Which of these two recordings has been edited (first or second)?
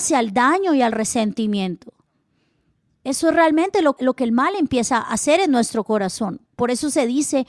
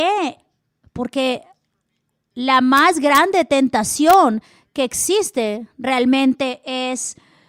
first